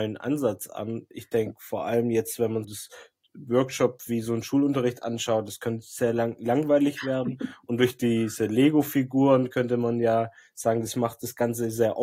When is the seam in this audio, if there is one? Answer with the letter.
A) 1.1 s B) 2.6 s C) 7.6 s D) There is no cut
B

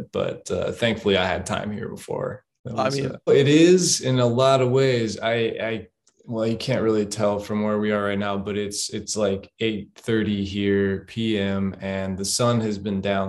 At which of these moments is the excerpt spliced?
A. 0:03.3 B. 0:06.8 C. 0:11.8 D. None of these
A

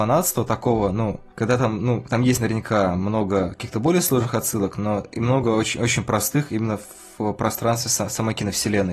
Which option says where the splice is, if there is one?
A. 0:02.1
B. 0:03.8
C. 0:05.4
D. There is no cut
D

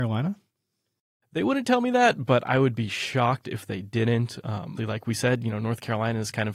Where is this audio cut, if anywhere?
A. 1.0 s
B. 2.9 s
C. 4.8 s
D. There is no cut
C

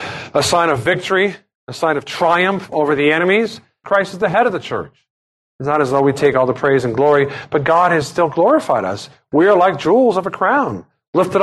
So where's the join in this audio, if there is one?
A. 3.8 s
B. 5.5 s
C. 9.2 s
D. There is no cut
A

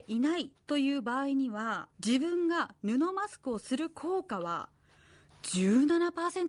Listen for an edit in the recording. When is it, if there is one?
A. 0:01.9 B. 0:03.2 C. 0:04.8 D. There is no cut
A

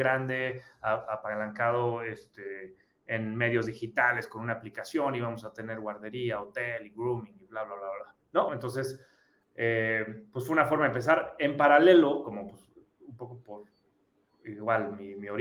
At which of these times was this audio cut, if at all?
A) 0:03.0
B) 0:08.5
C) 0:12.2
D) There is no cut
B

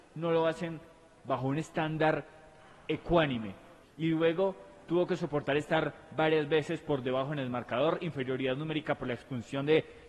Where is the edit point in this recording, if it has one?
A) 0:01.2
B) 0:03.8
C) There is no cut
B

